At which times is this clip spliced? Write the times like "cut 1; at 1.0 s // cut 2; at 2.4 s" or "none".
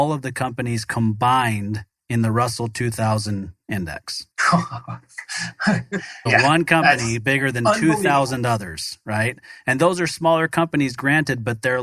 cut 1; at 4.3 s // cut 2; at 6.3 s